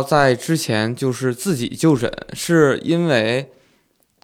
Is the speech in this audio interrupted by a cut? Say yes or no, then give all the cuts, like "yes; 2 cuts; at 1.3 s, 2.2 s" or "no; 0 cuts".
no; 0 cuts